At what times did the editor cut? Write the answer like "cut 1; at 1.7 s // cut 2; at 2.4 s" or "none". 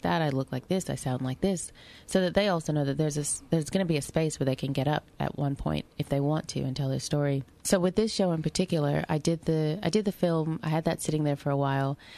none